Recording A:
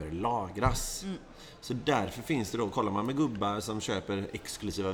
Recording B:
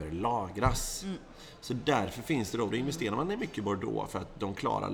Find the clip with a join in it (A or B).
B